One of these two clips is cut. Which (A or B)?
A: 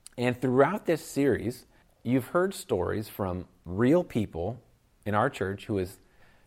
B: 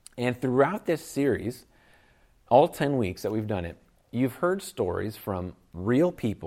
A